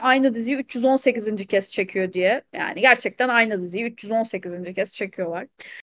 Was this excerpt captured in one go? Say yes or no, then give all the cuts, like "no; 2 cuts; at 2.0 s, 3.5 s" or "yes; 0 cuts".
no; 1 cut; at 2.5 s